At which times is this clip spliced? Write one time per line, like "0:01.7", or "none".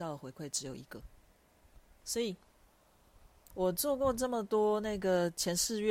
0:02.0
0:03.5

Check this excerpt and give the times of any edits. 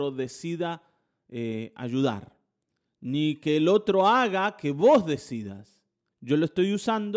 0:06.1

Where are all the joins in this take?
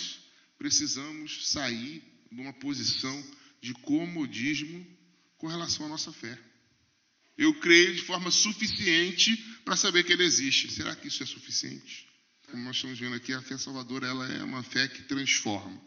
0:07.4
0:12.5

